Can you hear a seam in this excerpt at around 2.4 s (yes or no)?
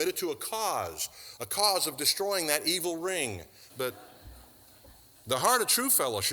no